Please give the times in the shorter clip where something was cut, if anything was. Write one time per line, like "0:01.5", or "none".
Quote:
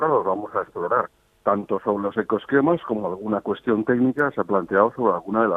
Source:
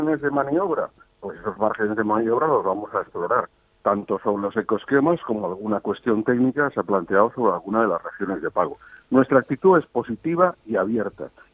none